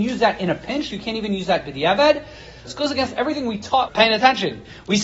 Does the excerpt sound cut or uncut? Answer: cut